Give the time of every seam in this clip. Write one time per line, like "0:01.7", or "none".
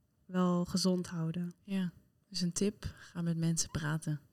0:02.2